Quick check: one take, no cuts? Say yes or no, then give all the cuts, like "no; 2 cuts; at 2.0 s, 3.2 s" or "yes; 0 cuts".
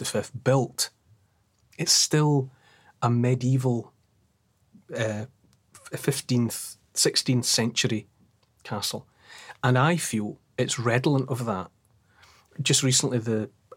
yes; 0 cuts